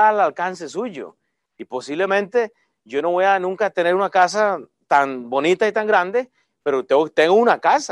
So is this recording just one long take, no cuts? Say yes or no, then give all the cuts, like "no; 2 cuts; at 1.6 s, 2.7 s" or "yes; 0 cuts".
no; 1 cut; at 1.5 s